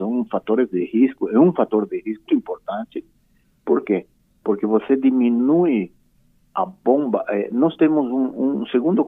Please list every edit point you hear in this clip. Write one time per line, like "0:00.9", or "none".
0:02.3